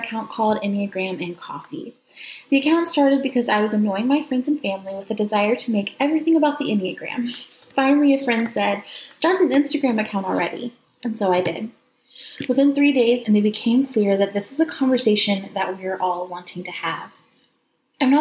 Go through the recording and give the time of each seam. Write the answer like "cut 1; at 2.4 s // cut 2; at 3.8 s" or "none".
cut 1; at 9.2 s // cut 2; at 13.2 s